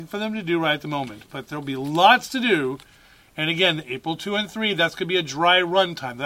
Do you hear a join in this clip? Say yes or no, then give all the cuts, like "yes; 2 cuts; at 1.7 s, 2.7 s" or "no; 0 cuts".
no; 0 cuts